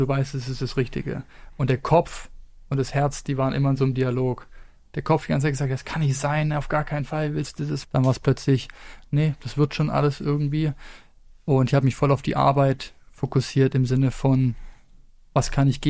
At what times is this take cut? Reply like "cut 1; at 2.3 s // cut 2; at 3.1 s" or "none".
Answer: cut 1; at 7.8 s

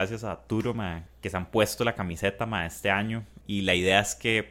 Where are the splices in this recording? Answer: cut 1; at 1.1 s // cut 2; at 3.4 s

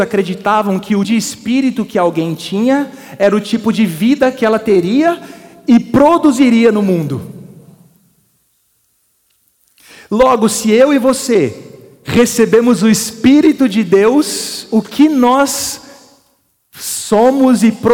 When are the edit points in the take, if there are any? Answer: cut 1; at 1.0 s

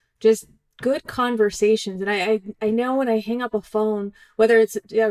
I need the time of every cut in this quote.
none

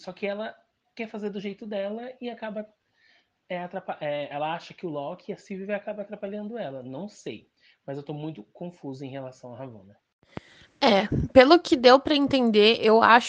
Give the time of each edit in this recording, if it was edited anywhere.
none

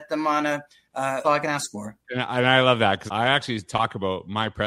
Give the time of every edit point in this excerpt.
cut 1; at 1.2 s // cut 2; at 3.1 s

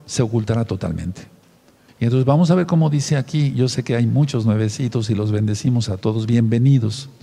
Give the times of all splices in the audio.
cut 1; at 1.9 s

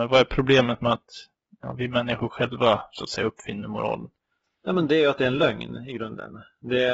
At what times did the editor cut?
none

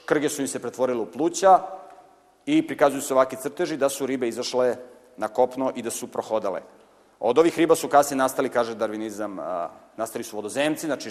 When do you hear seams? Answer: none

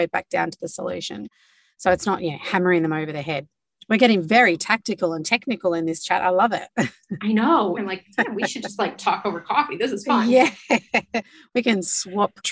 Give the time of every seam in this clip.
cut 1; at 7.8 s

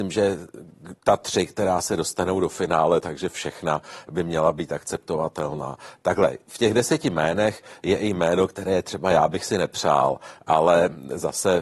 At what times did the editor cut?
cut 1; at 1.0 s

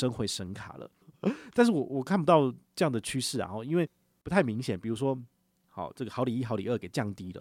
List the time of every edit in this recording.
cut 1; at 1.0 s // cut 2; at 5.6 s

